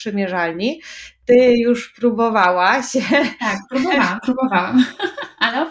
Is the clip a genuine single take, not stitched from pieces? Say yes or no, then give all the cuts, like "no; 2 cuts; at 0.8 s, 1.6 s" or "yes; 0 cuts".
yes; 0 cuts